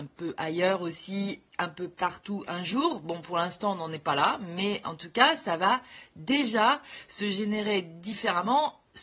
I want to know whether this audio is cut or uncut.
uncut